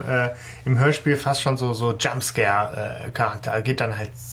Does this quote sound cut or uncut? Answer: uncut